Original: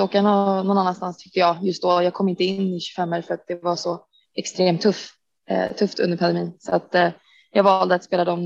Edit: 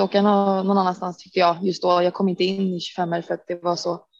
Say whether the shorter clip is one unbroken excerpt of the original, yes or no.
yes